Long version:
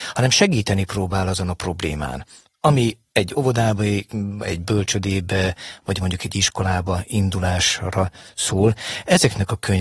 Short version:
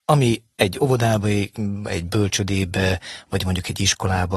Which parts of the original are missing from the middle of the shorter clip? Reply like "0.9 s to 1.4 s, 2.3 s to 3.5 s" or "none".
none